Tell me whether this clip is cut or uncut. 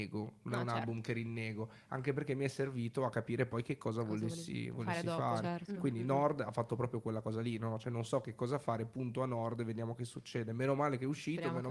uncut